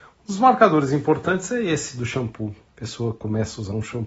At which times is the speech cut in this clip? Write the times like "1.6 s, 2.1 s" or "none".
2.7 s